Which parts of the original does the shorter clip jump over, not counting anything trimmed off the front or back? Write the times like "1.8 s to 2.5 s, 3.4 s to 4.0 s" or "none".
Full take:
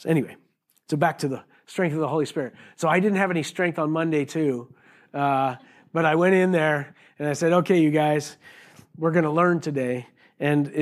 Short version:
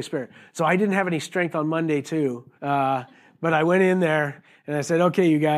4.8 s to 5.1 s